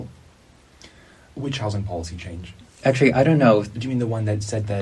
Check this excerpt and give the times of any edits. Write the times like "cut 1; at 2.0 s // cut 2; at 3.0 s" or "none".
none